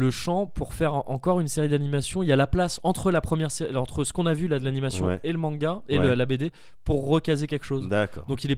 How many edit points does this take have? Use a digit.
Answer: 0